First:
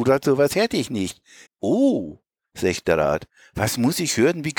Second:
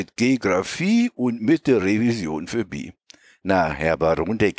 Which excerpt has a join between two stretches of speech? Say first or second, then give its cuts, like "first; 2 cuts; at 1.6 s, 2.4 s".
first; 1 cut; at 1.5 s